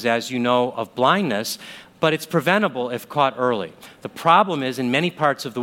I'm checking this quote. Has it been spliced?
no; 0 cuts

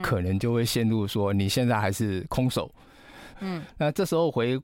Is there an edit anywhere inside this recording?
yes; 1 cut; at 3.3 s

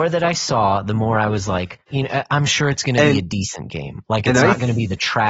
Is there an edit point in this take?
yes; 1 cut; at 1.9 s

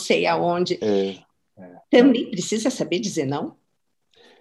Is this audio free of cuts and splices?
no; 1 cut; at 1.5 s

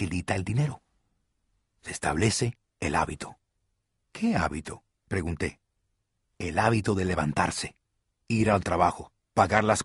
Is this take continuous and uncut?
yes; 0 cuts

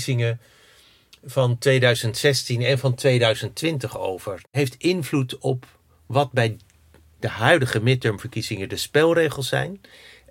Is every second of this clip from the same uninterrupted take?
no; 1 cut; at 4.4 s

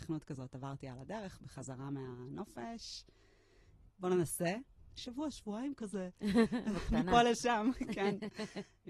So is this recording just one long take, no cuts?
no; 1 cut; at 3.9 s

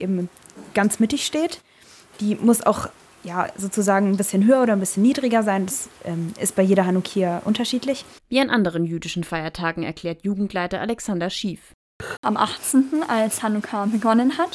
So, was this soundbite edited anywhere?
yes; 2 cuts; at 8.2 s, 12.2 s

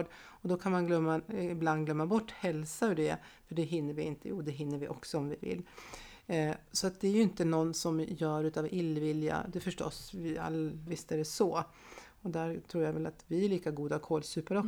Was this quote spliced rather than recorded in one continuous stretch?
yes; 1 cut; at 10.9 s

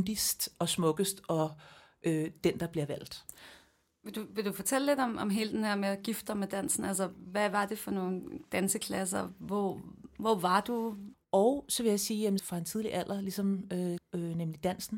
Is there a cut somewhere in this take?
yes; 3 cuts; at 11.1 s, 12.4 s, 14.0 s

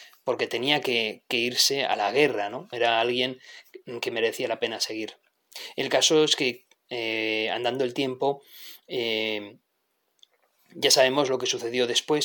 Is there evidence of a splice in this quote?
yes; 1 cut; at 2.7 s

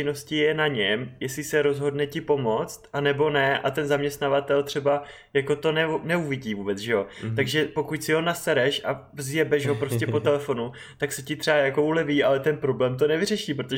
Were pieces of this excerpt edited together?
no; 0 cuts

